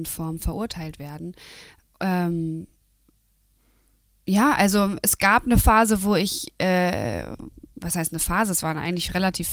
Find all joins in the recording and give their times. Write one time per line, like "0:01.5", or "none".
none